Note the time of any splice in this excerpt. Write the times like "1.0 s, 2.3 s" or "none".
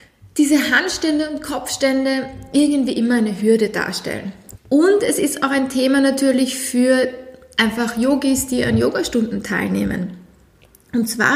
4.5 s, 7.6 s